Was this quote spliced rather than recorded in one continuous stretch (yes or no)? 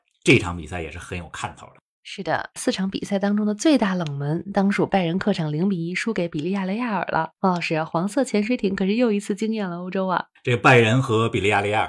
yes